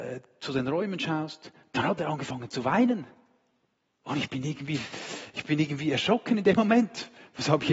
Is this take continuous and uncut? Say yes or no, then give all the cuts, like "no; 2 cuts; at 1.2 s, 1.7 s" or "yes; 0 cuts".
yes; 0 cuts